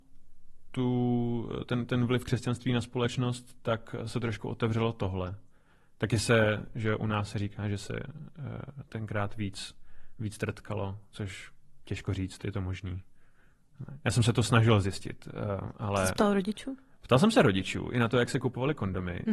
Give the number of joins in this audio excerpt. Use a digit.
0